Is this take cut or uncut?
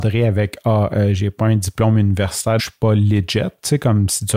cut